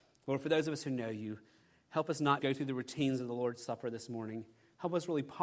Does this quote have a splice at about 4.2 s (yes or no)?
no